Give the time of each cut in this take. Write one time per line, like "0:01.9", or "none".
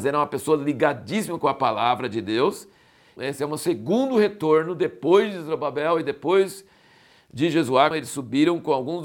0:03.2
0:07.9